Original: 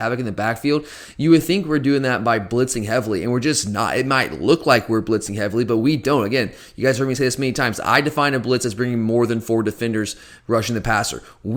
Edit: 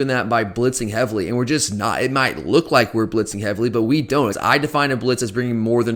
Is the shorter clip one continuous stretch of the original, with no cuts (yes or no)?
no